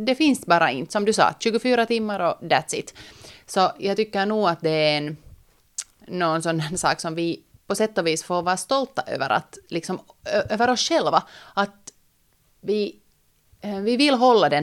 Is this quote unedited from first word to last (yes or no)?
yes